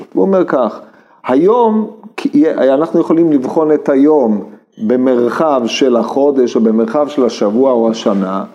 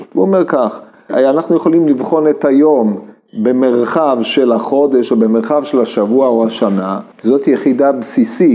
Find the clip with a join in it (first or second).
second